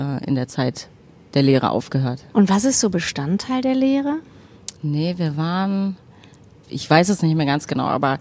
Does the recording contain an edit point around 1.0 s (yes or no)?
no